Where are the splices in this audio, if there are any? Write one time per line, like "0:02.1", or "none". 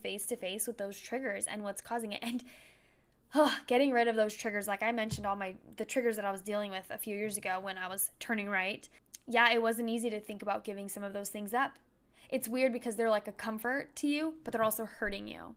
none